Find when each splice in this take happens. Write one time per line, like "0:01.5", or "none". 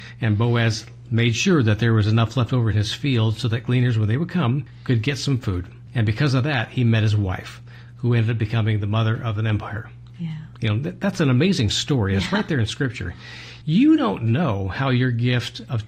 0:13.6